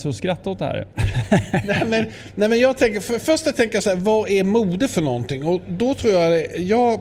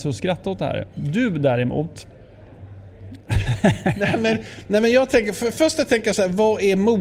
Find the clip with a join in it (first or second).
first